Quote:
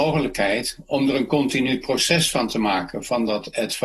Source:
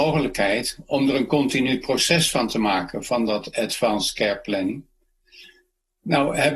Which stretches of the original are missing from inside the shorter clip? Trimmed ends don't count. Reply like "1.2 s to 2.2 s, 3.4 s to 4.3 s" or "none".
none